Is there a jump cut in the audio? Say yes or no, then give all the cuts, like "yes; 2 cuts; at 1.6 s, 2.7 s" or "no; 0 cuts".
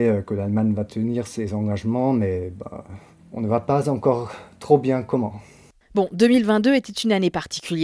no; 0 cuts